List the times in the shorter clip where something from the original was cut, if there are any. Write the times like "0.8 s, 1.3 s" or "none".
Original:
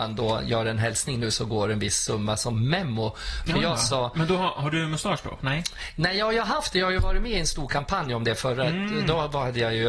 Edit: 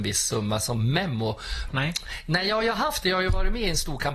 1.7 s